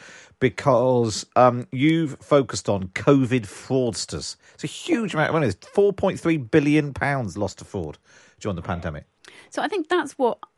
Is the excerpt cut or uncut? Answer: uncut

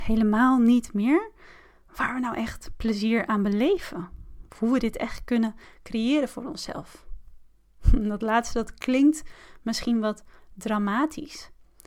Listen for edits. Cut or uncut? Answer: uncut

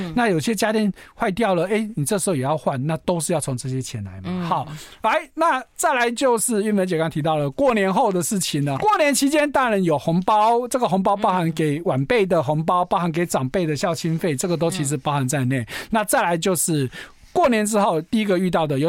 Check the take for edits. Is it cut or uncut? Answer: cut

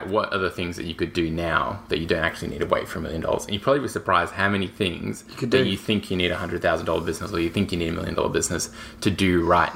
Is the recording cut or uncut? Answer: uncut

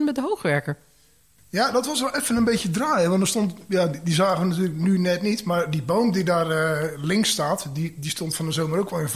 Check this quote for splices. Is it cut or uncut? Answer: uncut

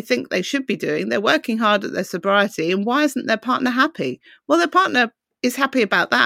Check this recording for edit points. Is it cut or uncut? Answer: uncut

